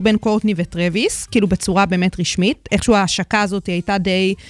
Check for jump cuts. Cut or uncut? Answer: uncut